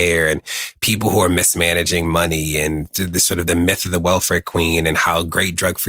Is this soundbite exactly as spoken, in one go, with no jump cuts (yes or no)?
yes